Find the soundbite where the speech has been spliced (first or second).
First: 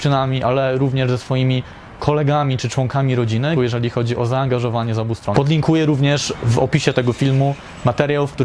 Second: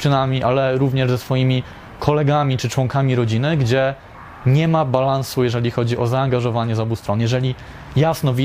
first